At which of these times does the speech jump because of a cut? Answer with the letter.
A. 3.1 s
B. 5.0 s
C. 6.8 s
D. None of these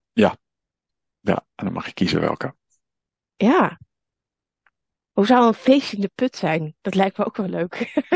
D